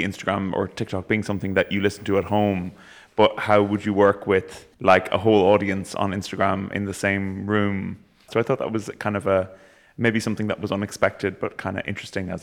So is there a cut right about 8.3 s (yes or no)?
yes